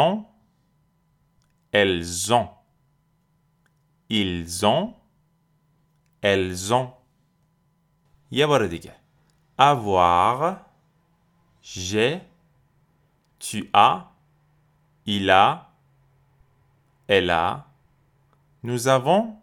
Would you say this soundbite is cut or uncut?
uncut